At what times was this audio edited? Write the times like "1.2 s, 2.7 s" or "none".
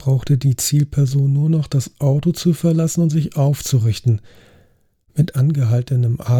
5.0 s

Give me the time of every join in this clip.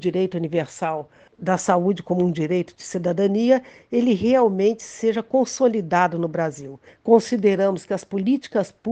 6.9 s

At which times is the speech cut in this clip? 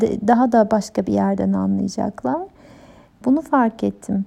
3.2 s

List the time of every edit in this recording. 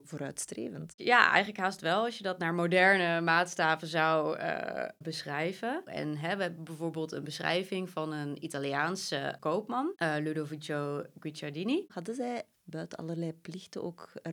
5.9 s, 11.9 s

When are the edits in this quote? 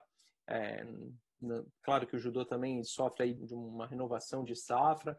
3.4 s

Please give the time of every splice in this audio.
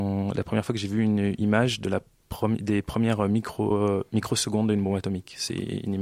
none

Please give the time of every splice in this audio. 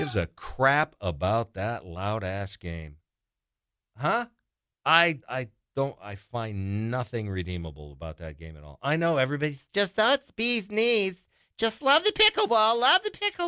5.2 s

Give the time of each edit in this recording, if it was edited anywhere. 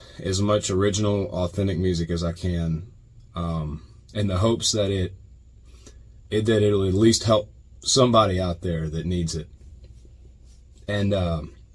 none

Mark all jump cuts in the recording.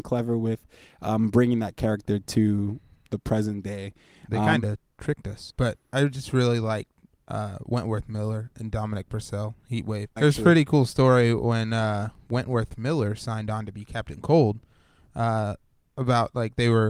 5.5 s, 10.2 s, 12.3 s

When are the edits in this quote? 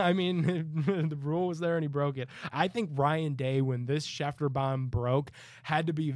2.5 s

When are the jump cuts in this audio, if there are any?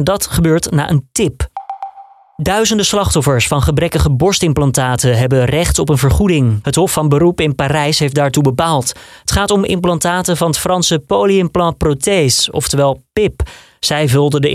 none

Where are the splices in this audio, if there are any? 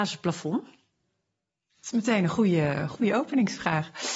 none

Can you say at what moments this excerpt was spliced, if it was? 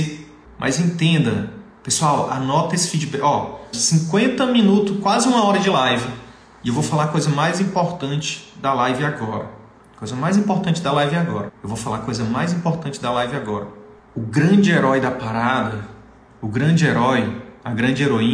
3.7 s, 11.5 s

